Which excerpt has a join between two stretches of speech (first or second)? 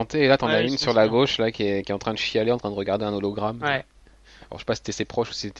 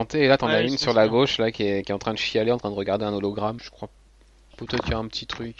second